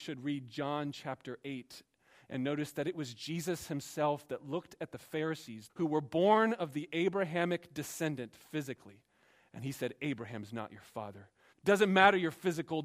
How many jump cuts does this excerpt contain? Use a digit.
2